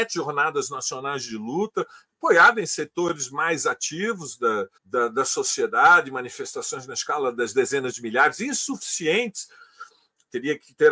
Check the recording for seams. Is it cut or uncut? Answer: cut